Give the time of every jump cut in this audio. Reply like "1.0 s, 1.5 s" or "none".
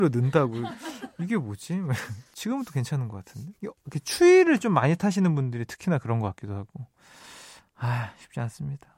2.3 s, 3.6 s